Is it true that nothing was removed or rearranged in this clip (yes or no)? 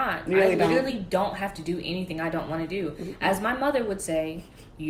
yes